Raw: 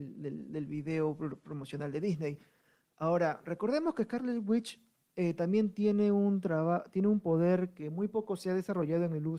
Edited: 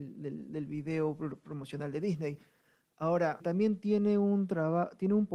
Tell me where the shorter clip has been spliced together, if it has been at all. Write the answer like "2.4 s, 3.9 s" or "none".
3.4 s